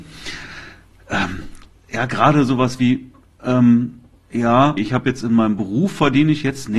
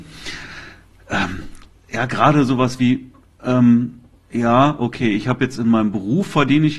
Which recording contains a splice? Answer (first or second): first